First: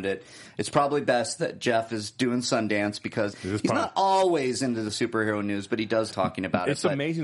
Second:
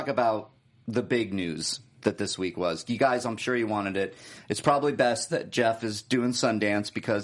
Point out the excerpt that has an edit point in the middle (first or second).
first